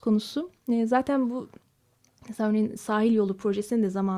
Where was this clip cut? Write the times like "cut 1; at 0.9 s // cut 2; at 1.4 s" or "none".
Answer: none